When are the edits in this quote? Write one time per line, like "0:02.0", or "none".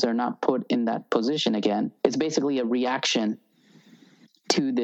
0:02.0